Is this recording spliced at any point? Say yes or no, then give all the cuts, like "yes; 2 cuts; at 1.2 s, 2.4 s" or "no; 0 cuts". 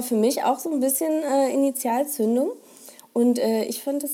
no; 0 cuts